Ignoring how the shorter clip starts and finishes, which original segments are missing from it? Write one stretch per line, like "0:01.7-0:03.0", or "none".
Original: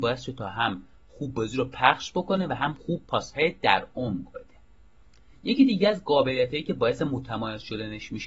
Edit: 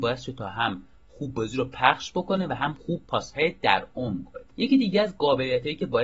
0:04.5-0:05.4